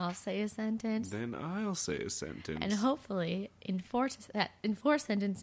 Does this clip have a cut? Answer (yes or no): no